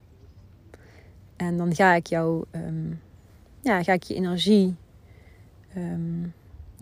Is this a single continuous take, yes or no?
yes